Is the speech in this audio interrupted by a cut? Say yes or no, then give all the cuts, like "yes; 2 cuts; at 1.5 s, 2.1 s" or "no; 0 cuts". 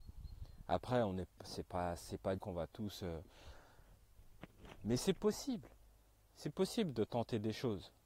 yes; 1 cut; at 2.4 s